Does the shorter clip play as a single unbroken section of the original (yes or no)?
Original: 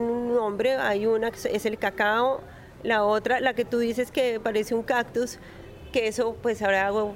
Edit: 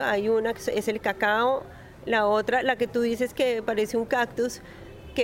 yes